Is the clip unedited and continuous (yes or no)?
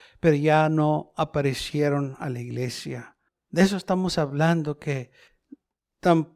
yes